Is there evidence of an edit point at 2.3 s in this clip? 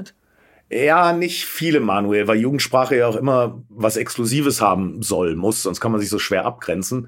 no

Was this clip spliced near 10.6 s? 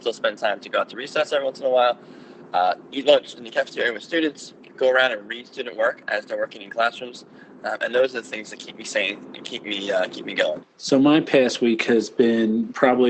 yes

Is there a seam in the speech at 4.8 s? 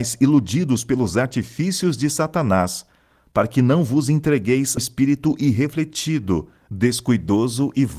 yes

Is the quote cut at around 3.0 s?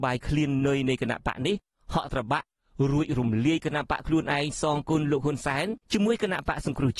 no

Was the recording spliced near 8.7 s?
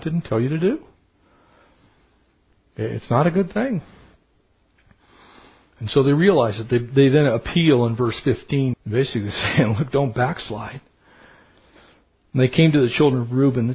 yes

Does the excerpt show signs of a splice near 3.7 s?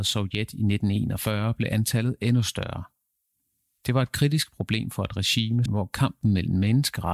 no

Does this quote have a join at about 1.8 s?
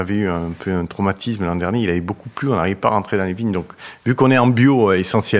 no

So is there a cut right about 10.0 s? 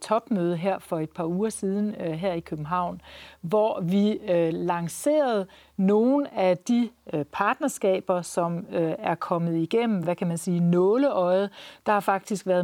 no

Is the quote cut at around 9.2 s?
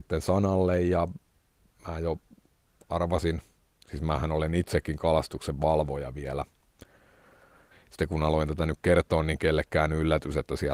no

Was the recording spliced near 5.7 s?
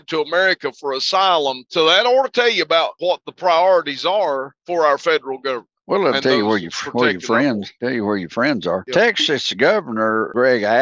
no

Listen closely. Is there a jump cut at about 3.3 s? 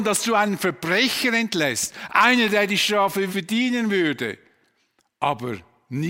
yes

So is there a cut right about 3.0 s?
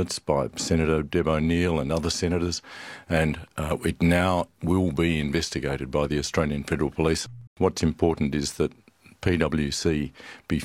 no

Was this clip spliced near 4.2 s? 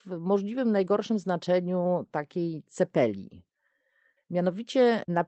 yes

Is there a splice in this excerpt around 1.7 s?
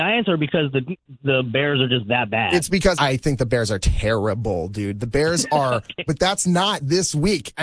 no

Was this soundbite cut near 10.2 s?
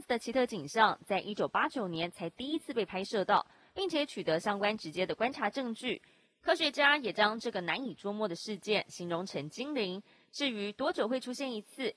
no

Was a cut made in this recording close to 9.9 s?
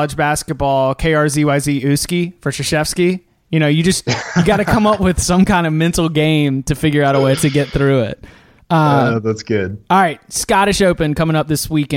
no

